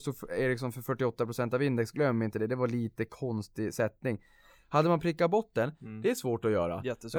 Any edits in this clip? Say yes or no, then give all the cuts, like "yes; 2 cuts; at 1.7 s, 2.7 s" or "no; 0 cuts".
no; 0 cuts